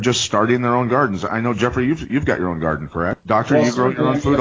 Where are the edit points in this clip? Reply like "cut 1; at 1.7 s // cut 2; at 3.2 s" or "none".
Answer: cut 1; at 3.1 s